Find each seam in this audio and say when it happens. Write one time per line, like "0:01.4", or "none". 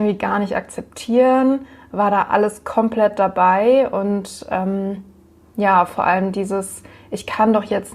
none